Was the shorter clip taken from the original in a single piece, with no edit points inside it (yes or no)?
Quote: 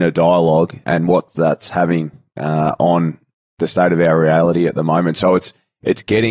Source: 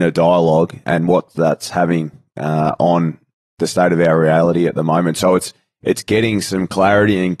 yes